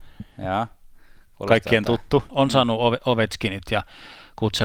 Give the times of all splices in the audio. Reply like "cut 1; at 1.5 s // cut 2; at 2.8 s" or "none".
cut 1; at 2.3 s